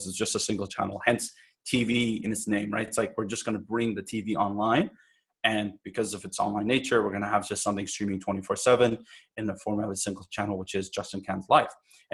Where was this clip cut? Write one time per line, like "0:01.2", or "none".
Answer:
none